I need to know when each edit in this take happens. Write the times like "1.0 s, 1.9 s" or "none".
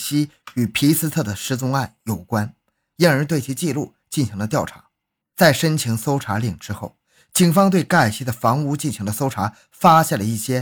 5.2 s